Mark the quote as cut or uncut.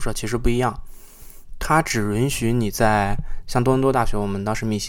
uncut